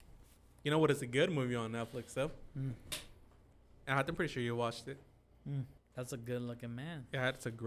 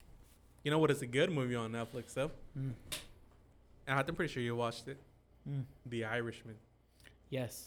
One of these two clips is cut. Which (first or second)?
first